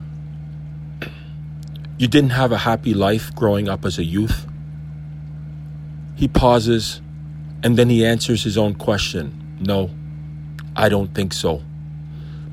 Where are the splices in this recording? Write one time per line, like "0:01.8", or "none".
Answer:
0:06.1